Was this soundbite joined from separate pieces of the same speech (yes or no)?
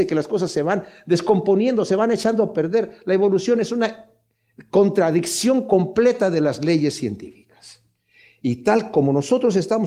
no